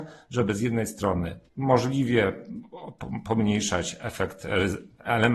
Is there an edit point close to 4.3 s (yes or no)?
no